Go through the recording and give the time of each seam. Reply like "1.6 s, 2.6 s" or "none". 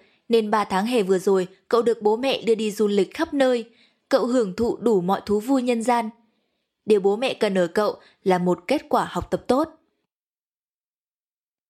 none